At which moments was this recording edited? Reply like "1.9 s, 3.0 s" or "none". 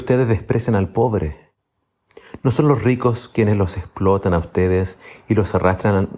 none